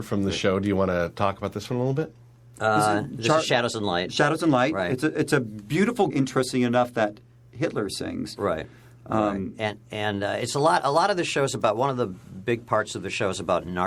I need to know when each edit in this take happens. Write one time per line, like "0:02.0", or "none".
0:06.1